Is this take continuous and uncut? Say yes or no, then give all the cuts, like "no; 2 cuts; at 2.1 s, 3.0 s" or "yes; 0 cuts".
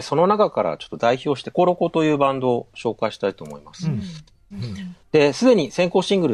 no; 2 cuts; at 1.5 s, 4.5 s